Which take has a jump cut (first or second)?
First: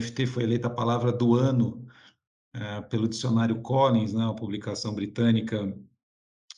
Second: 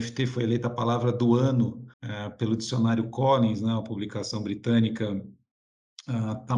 second